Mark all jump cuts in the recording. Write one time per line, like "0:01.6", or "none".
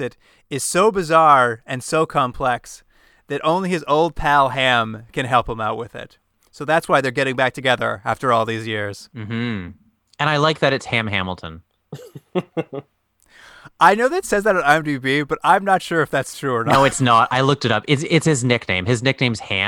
none

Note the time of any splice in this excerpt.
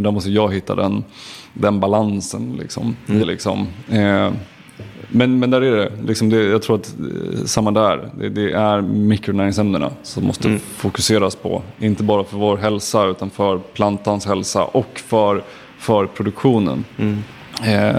0:03.2

